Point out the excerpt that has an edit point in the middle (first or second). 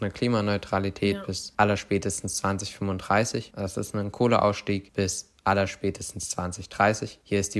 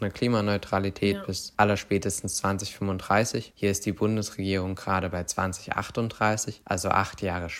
second